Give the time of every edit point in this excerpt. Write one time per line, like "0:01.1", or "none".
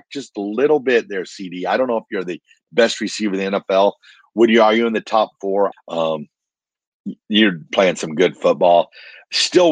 0:05.7